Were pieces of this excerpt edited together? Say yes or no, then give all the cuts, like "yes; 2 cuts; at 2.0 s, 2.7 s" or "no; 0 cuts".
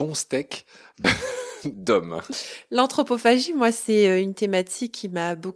no; 0 cuts